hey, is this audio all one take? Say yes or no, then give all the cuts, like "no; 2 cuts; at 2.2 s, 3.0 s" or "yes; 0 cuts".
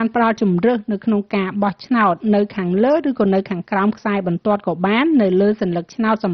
yes; 0 cuts